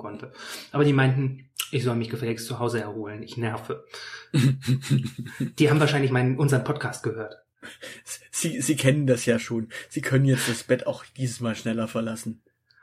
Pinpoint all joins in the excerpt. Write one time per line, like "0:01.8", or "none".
none